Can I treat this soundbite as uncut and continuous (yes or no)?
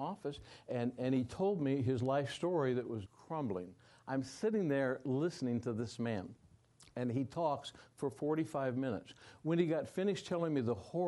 no